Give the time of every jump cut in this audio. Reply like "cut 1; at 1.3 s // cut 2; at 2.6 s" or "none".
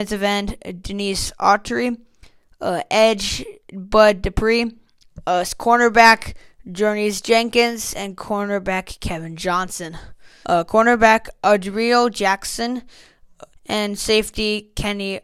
cut 1; at 10.4 s // cut 2; at 13.5 s